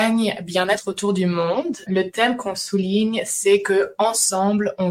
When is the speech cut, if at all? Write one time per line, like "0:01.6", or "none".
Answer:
0:01.9